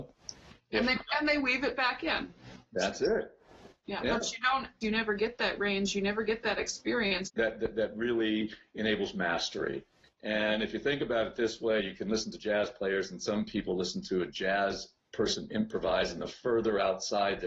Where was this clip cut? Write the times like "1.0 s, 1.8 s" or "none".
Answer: 4.8 s, 7.2 s